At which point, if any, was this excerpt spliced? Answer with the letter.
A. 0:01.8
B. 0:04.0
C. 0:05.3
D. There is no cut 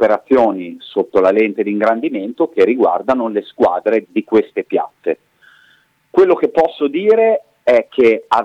B